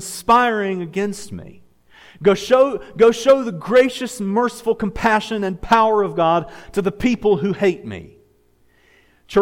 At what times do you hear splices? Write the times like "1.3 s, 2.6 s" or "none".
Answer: none